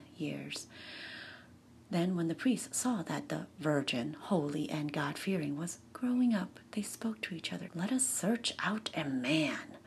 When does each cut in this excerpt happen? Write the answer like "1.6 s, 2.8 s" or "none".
7.7 s